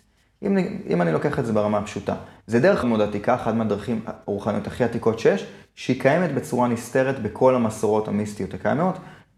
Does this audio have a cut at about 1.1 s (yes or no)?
no